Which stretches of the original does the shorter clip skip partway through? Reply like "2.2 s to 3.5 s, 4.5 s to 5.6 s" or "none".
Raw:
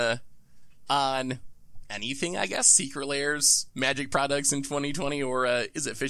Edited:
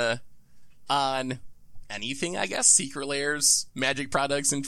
none